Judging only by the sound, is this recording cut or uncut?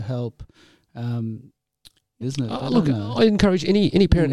cut